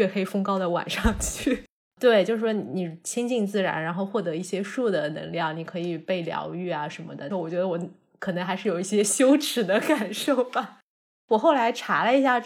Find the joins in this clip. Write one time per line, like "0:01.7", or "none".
0:01.9
0:07.3